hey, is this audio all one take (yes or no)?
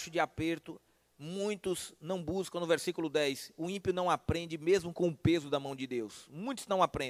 yes